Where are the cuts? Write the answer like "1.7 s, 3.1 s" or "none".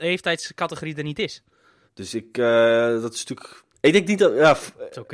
1.9 s, 3.7 s

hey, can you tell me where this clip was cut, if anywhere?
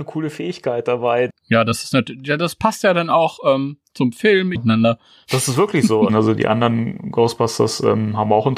1.3 s, 4.5 s, 6.1 s

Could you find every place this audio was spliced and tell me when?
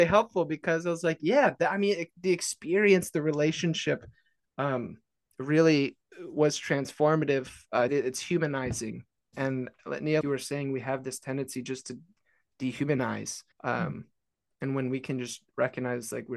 7.9 s, 10.2 s, 13.5 s

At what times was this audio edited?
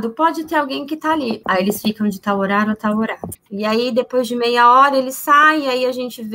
1.4 s, 3.3 s

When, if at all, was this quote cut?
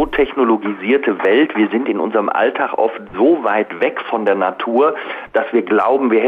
none

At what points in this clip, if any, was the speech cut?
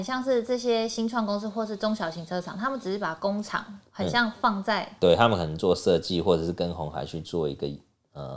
5.0 s

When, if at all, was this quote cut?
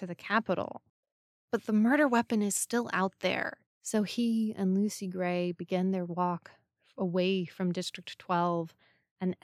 3.6 s

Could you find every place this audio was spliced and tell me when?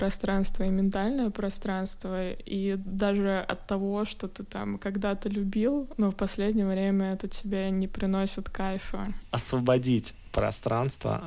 9.2 s

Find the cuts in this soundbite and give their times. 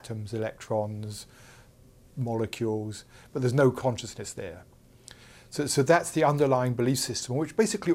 none

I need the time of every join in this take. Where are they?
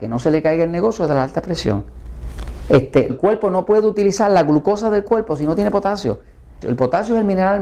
3.1 s, 6.6 s

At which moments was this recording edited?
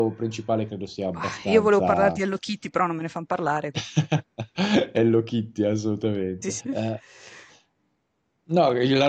6.6 s

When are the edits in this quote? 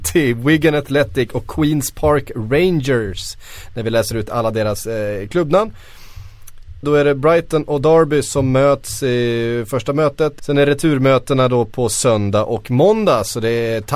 6.8 s, 10.4 s

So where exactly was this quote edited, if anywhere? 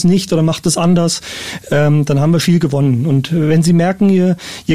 2.4 s

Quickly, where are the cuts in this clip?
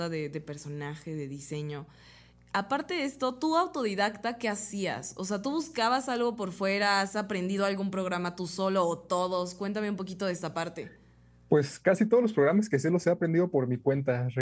none

